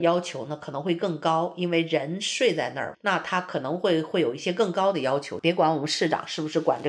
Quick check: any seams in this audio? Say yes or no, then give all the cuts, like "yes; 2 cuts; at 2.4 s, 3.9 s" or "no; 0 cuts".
yes; 2 cuts; at 2.9 s, 5.4 s